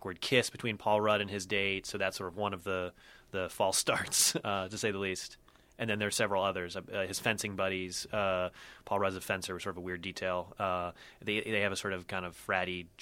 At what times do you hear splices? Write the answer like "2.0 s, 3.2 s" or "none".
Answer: none